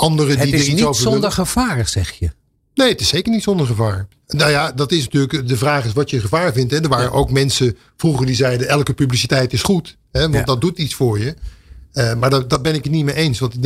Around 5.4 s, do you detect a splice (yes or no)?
yes